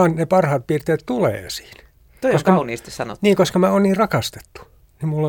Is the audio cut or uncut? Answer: uncut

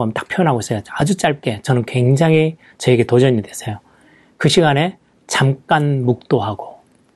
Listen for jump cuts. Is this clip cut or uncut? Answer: uncut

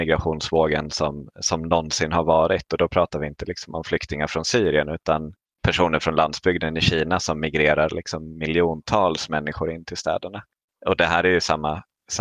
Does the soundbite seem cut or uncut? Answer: uncut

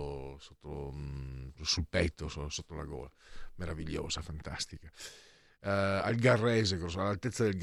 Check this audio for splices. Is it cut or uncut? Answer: uncut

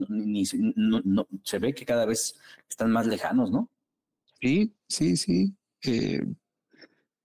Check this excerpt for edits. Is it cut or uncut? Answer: uncut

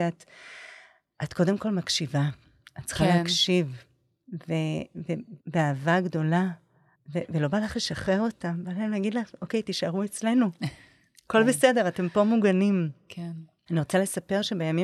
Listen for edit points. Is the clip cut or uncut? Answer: cut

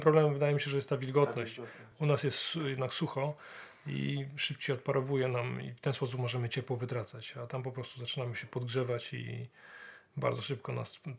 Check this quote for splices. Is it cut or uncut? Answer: uncut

